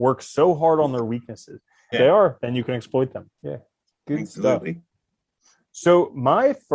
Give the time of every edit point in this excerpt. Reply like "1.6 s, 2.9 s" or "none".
1.9 s, 3.3 s